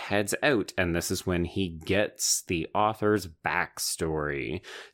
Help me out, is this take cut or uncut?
uncut